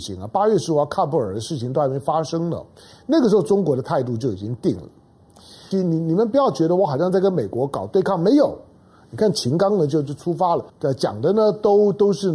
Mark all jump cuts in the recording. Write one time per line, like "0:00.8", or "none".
0:05.7
0:10.7